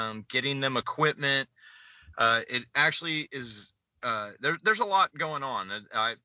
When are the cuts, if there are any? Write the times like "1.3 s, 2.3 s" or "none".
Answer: none